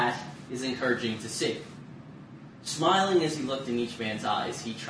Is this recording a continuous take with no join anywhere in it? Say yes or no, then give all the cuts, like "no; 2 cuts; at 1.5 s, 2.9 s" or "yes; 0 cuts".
yes; 0 cuts